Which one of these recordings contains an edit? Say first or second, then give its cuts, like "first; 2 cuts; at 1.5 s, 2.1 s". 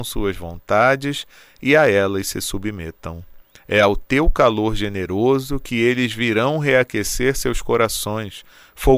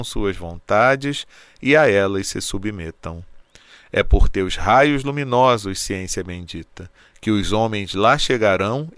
first; 1 cut; at 3.6 s